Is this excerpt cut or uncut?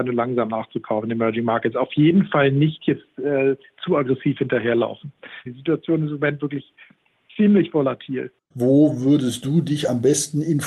cut